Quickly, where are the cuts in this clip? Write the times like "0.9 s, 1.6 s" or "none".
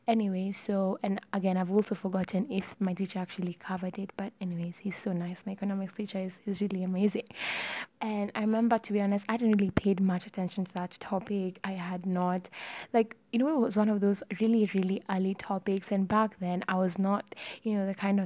7.9 s